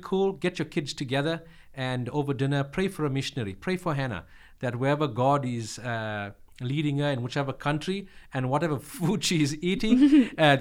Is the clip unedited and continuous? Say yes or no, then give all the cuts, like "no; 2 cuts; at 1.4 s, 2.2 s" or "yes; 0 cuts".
yes; 0 cuts